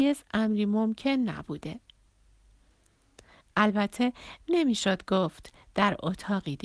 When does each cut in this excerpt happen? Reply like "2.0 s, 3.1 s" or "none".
3.4 s

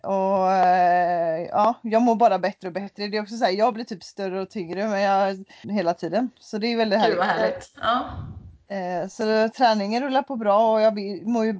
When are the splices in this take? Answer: 5.6 s

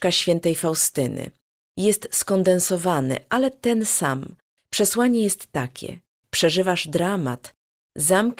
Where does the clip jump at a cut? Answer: 4.6 s, 6.2 s

